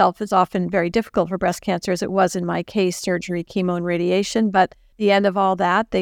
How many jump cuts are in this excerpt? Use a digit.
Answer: 0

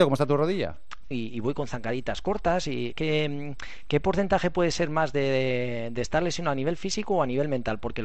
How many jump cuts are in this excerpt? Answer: 2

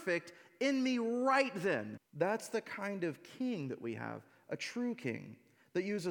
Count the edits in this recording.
1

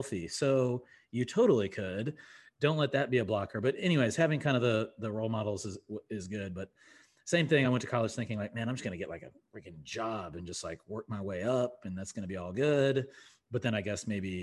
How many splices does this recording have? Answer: 0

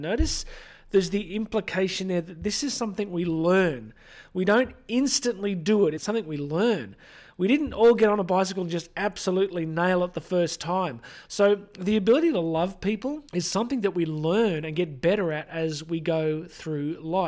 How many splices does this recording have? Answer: 3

